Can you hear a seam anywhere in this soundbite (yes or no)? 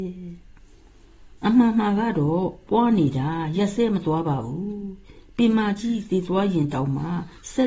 yes